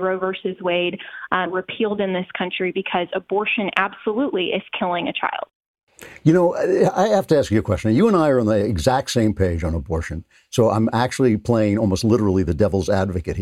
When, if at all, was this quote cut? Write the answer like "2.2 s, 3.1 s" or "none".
1.5 s